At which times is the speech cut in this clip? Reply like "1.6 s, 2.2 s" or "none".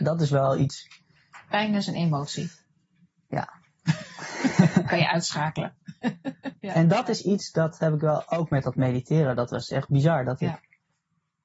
6.5 s